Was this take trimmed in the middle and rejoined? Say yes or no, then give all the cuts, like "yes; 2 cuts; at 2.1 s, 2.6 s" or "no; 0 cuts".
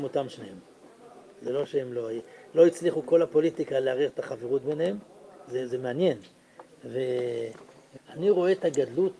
yes; 1 cut; at 8.0 s